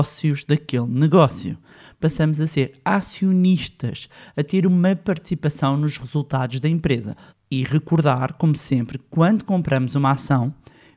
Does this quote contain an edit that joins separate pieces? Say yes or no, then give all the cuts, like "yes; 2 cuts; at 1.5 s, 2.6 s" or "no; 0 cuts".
yes; 1 cut; at 7.3 s